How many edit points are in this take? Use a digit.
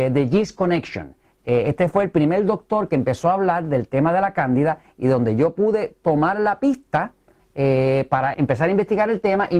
2